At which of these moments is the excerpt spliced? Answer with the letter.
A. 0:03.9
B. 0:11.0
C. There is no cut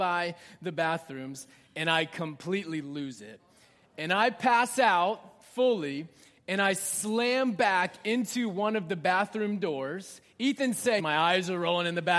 B